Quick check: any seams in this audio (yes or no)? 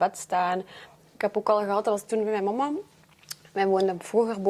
no